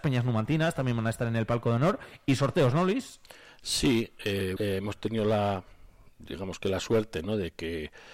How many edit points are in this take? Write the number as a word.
one